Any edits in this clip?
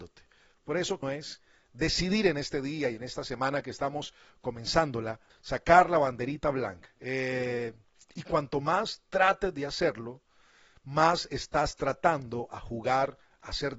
yes; 3 cuts; at 1.0 s, 5.3 s, 6.9 s

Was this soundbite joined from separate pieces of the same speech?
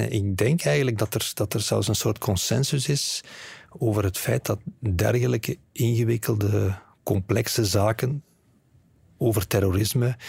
no; 0 cuts

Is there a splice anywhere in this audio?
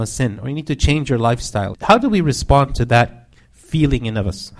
yes; 1 cut; at 1.7 s

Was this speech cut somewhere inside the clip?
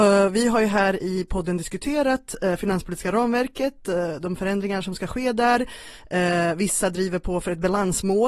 no; 0 cuts

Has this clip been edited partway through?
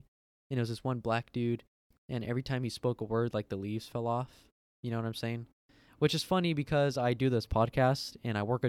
no; 0 cuts

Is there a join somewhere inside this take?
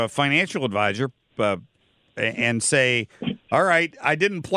no; 0 cuts

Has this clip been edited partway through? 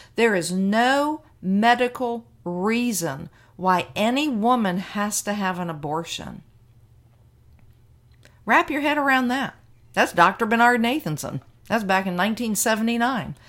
no; 0 cuts

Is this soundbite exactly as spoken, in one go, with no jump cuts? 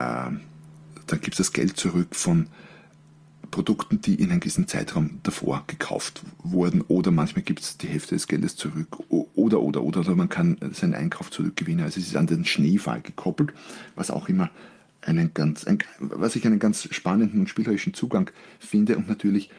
yes; 0 cuts

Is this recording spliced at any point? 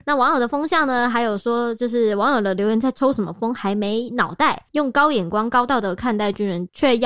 no; 0 cuts

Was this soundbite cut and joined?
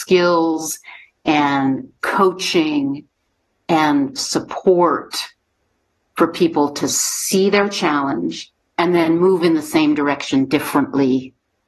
yes; 1 cut; at 8.7 s

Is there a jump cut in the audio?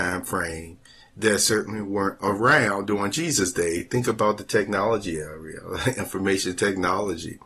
no; 0 cuts

